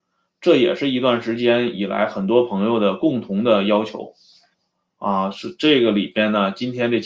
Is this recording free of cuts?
yes; 0 cuts

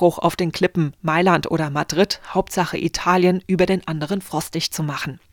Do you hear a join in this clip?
no; 0 cuts

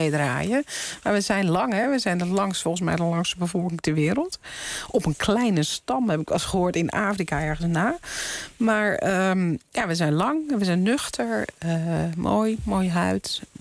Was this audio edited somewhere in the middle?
no; 0 cuts

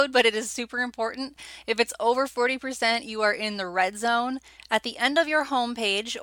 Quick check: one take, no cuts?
no; 1 cut; at 4.6 s

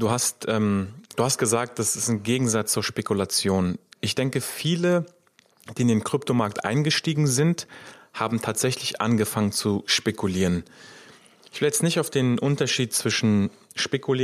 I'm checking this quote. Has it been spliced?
no; 0 cuts

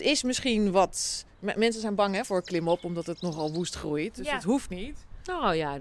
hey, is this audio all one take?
yes; 0 cuts

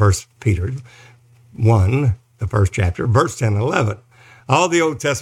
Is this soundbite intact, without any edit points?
yes; 0 cuts

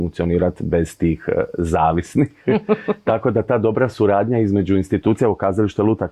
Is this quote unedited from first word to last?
yes; 0 cuts

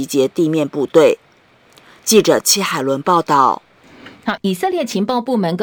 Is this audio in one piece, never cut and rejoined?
no; 1 cut; at 4.4 s

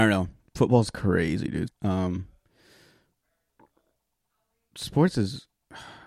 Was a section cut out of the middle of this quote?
yes; 1 cut; at 1.7 s

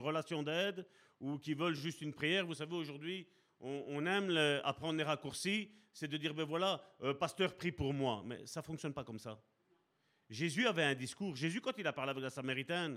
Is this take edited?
no; 0 cuts

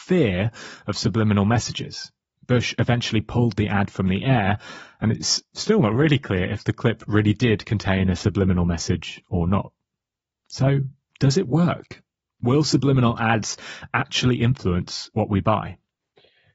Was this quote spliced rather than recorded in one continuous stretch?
no; 0 cuts

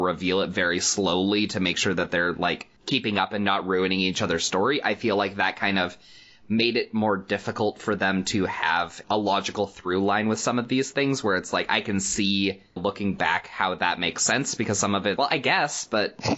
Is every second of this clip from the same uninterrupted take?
no; 2 cuts; at 12.8 s, 15.2 s

